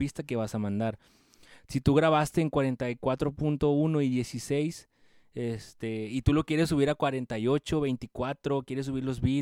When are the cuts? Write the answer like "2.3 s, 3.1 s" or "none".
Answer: none